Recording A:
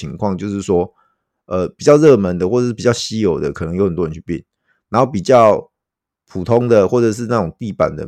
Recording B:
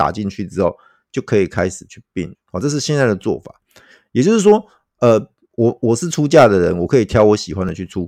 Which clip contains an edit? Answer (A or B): B